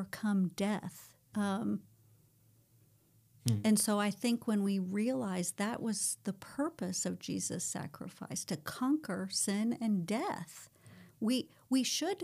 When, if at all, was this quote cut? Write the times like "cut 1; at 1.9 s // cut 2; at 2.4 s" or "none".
cut 1; at 1.3 s // cut 2; at 11.1 s